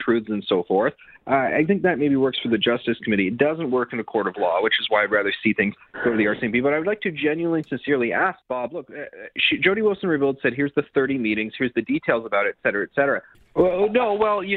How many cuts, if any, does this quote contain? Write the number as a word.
two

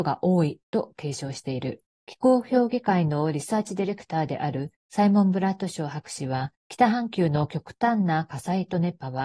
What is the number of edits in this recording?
one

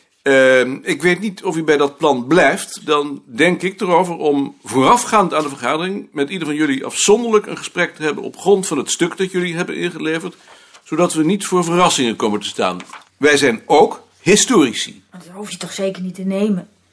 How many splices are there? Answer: two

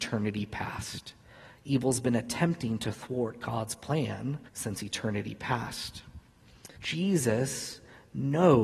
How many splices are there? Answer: two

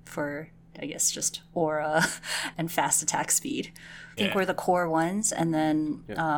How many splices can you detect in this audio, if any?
two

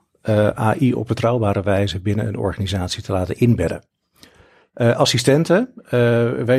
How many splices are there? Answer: zero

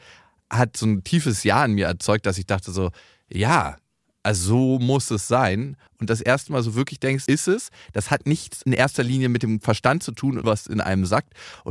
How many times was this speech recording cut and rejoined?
three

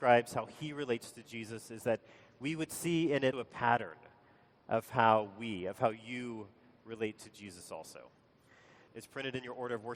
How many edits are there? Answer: two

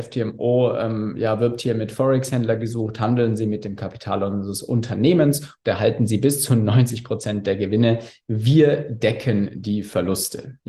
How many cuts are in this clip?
zero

